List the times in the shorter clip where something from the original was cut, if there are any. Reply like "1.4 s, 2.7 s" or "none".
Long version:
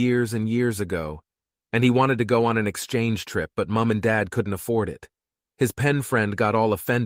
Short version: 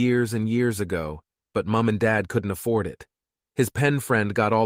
1.5 s